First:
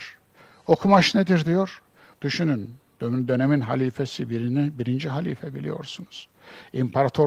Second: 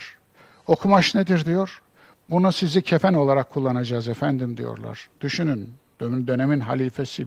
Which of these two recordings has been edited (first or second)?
first